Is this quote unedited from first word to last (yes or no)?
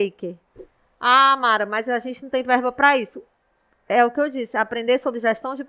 yes